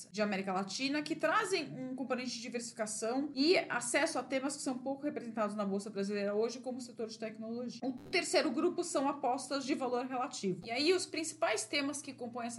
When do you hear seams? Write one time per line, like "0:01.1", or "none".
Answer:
0:10.6